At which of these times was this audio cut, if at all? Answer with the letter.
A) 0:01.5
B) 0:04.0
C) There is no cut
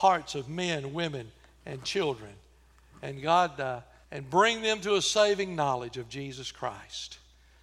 B